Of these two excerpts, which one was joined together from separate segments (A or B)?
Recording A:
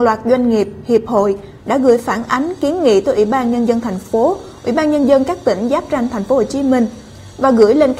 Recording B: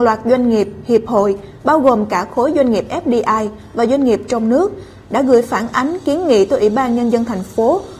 A